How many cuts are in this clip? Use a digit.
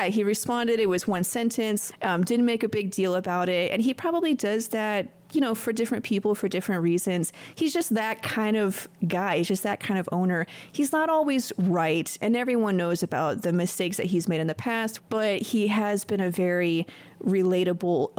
0